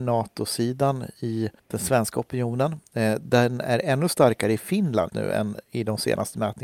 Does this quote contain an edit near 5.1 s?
yes; 2 cuts; at 1.6 s, 5.1 s

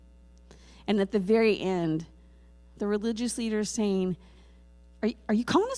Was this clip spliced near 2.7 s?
no; 0 cuts

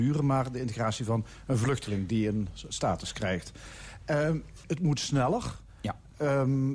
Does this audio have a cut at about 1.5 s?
no; 1 cut; at 4.6 s

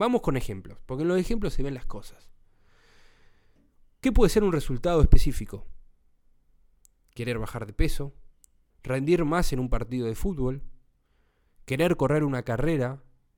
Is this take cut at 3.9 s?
no; 1 cut; at 8.7 s

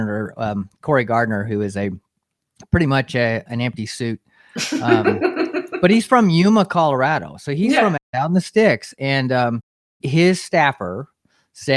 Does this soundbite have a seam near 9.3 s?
no; 1 cut; at 3.5 s

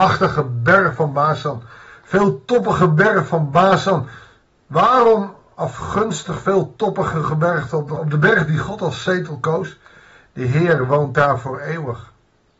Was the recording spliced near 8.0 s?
yes; 1 cut; at 8.0 s

